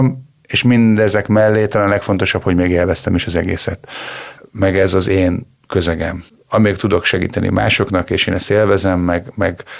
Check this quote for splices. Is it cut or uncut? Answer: cut